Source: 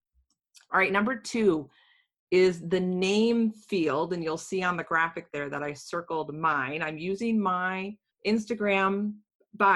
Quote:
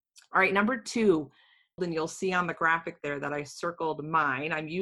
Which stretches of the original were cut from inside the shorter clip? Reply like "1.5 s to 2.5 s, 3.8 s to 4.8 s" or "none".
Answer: 2.2 s to 4.1 s